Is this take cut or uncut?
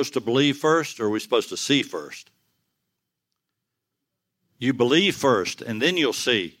uncut